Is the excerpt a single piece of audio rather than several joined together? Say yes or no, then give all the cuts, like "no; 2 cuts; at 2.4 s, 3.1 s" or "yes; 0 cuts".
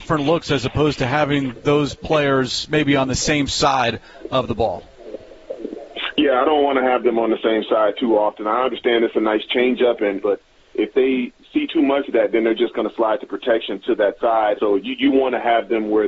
no; 2 cuts; at 10.2 s, 14.6 s